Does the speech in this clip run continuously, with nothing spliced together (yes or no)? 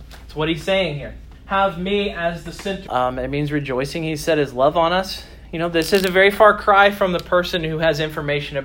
no